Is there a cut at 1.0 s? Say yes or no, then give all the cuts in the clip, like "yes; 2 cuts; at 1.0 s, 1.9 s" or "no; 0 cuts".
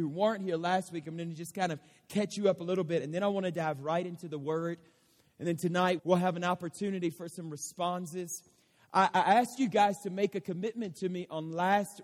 no; 1 cut; at 6.0 s